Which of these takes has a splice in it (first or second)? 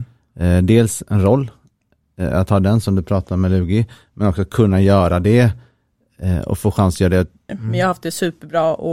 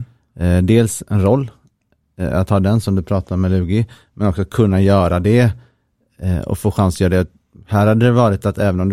first